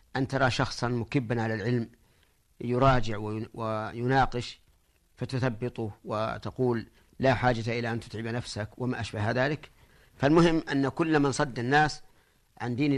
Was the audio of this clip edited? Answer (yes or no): no